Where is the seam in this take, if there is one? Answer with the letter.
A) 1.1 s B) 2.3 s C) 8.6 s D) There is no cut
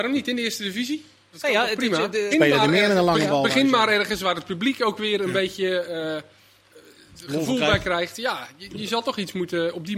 B